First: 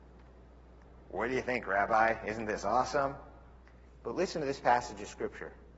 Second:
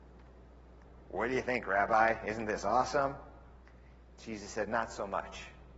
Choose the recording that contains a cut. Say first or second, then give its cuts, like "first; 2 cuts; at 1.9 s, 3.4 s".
first; 1 cut; at 3.8 s